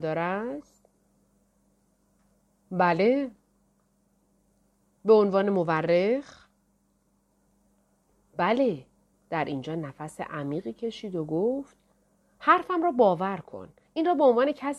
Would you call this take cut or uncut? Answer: cut